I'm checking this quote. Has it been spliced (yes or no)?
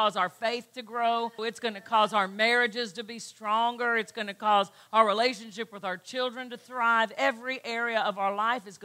yes